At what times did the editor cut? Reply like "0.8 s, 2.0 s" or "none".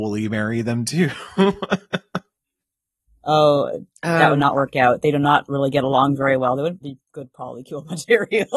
6.8 s